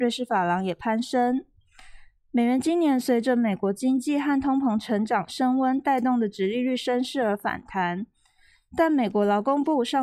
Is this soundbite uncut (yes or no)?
yes